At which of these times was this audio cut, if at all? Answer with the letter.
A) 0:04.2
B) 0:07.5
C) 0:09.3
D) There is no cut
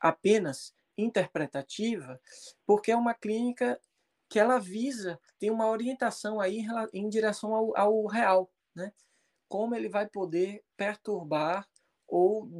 C